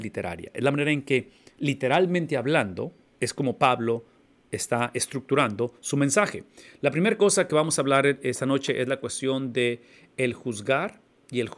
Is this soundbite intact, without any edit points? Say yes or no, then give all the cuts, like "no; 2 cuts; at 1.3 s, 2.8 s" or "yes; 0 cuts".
yes; 0 cuts